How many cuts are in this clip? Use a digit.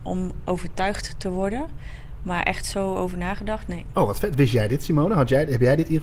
1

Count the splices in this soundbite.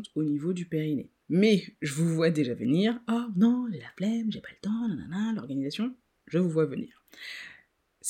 1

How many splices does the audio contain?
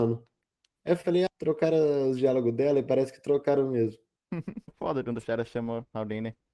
2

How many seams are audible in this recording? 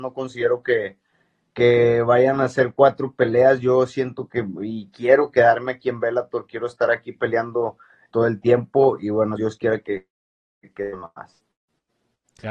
2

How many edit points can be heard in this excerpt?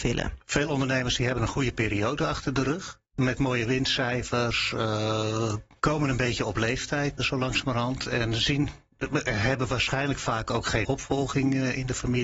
3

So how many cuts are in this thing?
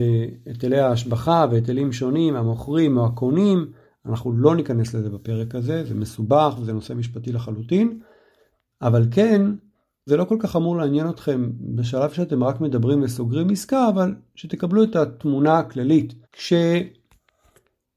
2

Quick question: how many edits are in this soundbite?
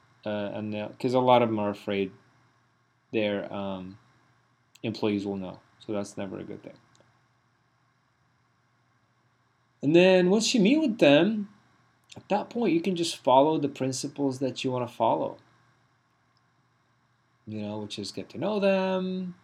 0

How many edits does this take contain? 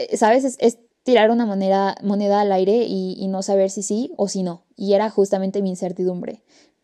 1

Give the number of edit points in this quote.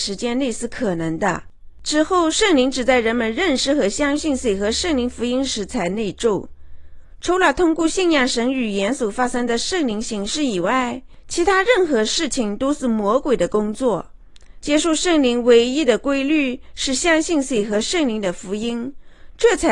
1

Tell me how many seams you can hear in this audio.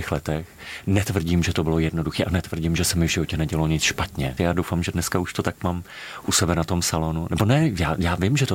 1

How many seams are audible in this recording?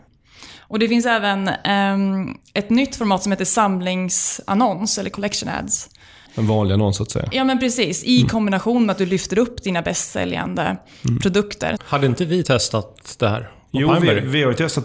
2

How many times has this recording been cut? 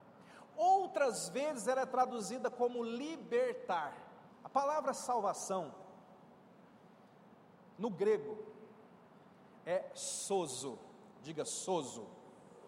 1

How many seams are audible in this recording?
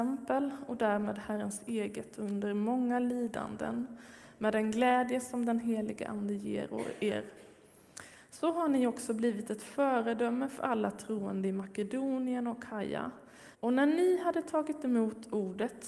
1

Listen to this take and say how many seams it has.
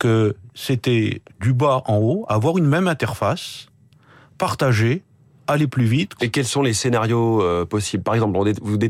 1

